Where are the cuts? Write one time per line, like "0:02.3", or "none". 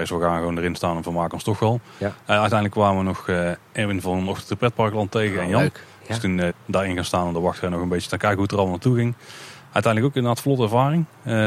0:06.5